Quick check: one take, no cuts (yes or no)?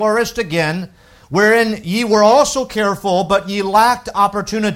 yes